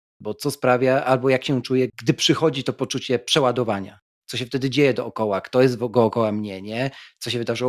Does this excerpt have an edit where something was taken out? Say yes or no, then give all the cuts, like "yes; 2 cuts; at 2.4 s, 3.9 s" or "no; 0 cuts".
yes; 1 cut; at 1.9 s